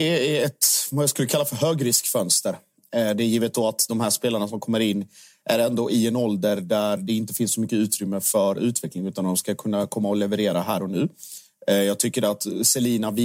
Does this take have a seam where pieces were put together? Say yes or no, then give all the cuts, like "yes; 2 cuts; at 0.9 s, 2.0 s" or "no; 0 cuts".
no; 0 cuts